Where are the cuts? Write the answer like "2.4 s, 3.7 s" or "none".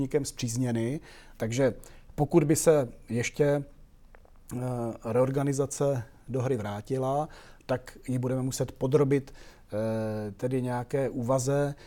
1.4 s

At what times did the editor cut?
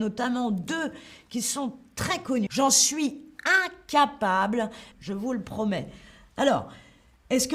2.5 s, 4.9 s

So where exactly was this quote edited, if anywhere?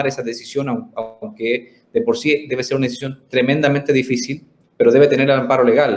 none

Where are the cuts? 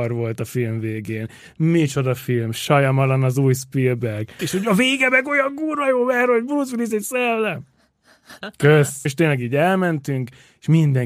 4.4 s, 9.1 s

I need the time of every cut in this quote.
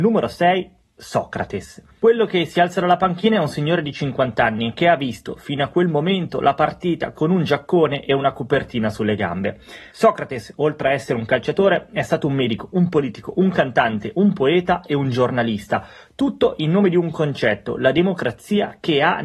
9.9 s

